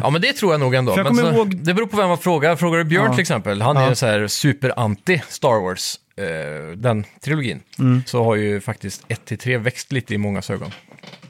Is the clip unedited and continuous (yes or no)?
no